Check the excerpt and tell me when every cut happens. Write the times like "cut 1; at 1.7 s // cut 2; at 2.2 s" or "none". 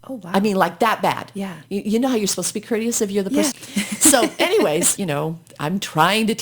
cut 1; at 3.5 s // cut 2; at 5.0 s